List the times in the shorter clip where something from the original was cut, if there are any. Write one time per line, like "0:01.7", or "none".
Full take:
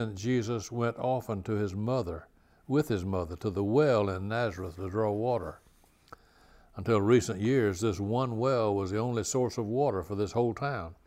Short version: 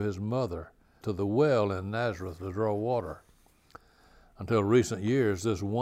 0:01.0